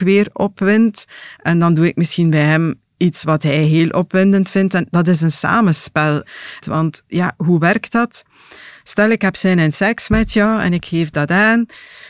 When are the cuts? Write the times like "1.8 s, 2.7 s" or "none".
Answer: 6.6 s